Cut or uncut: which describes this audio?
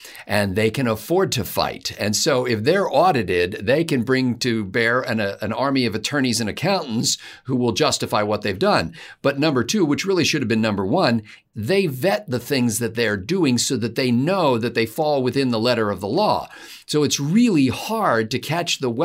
cut